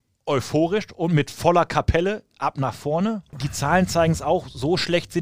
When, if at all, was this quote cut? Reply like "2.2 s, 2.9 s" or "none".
3.3 s